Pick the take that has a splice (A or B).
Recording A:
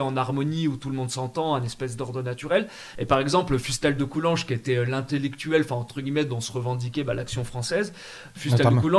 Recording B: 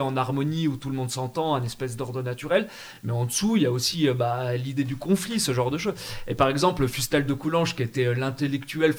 A